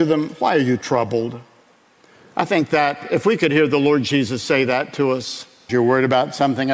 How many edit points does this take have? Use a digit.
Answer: 1